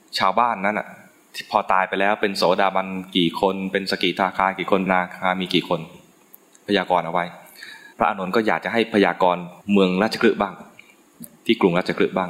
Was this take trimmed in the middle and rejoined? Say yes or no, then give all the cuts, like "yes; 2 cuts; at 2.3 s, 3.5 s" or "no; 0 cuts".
yes; 3 cuts; at 4.9 s, 7.9 s, 9.6 s